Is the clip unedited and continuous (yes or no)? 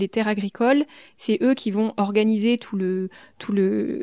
yes